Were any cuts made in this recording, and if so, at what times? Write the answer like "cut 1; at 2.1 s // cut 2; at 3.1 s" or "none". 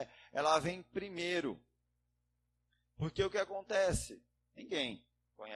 cut 1; at 4.4 s

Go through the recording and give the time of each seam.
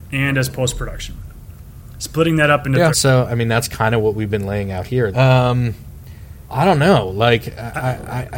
cut 1; at 2.9 s // cut 2; at 5.1 s // cut 3; at 6.5 s

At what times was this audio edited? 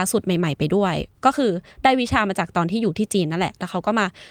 cut 1; at 1.1 s

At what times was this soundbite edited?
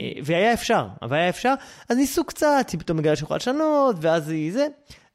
none

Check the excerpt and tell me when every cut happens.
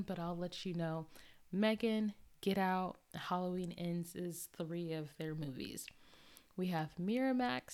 none

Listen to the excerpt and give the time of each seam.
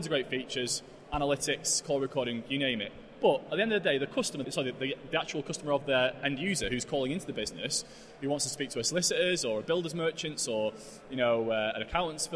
cut 1; at 4.4 s

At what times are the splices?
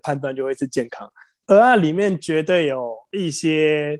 cut 1; at 1.4 s

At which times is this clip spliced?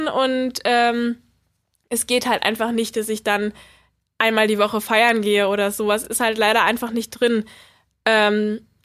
none

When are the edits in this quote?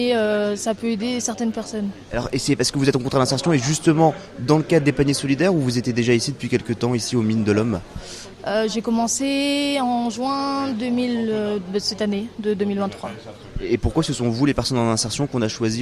cut 1; at 2.1 s

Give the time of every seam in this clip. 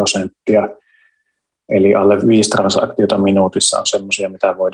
cut 1; at 2.2 s

